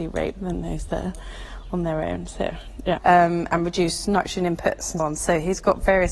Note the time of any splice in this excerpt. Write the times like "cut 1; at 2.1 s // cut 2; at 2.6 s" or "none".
cut 1; at 3.0 s // cut 2; at 5.0 s